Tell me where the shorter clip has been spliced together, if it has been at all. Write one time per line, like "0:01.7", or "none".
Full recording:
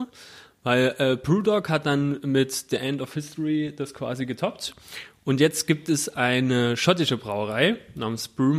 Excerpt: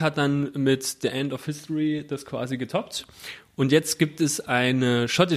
none